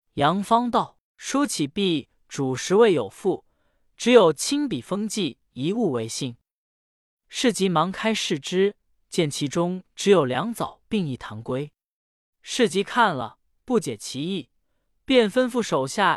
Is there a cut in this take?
no; 0 cuts

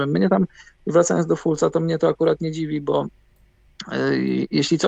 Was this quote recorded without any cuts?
yes; 0 cuts

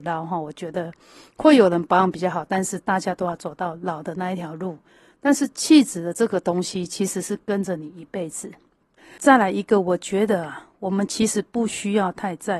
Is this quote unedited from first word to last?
yes; 0 cuts

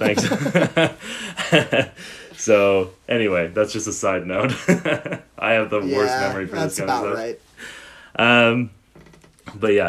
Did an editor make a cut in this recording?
no; 0 cuts

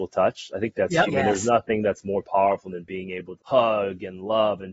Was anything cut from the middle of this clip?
yes; 2 cuts; at 1.1 s, 3.4 s

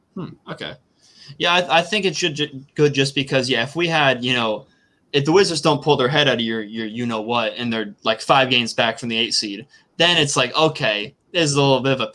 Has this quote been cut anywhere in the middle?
no; 0 cuts

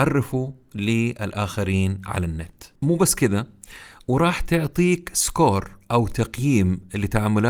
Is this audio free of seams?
no; 1 cut; at 2.8 s

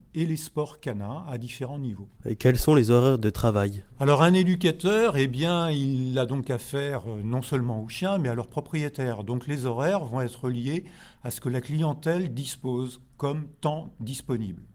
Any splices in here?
no; 0 cuts

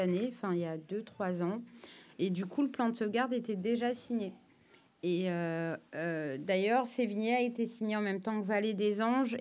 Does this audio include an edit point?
no; 0 cuts

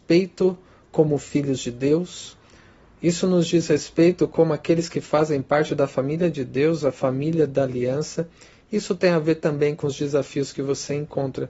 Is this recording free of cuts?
yes; 0 cuts

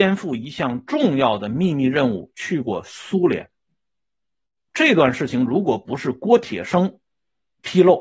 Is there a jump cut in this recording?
no; 0 cuts

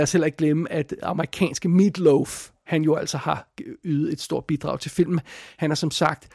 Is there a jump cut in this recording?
no; 0 cuts

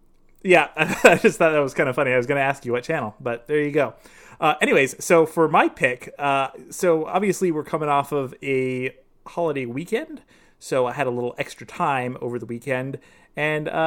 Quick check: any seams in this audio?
no; 0 cuts

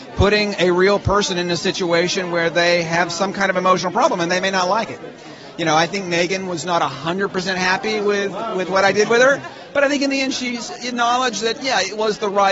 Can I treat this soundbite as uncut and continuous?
yes; 0 cuts

